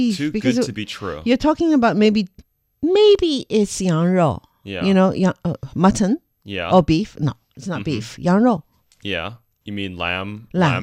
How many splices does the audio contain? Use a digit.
1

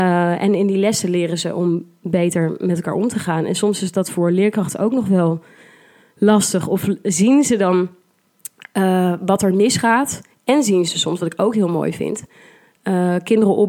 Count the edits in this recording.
0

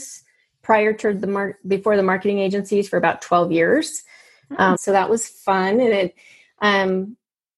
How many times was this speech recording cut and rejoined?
1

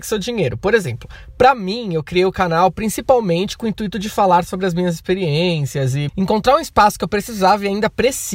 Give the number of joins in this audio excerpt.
1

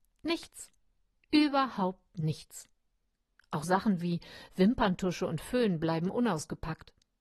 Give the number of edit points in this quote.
1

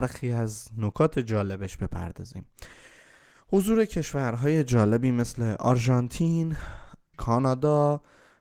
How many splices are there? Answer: 1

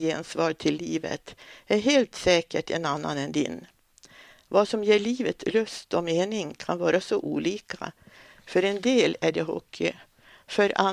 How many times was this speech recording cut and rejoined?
0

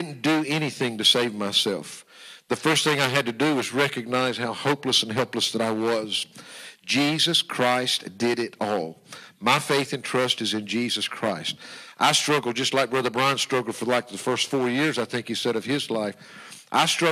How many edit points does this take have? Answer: 0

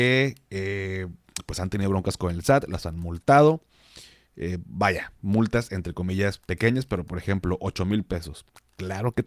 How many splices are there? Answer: 0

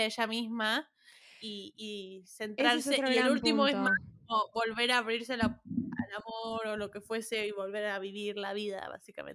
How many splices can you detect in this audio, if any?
0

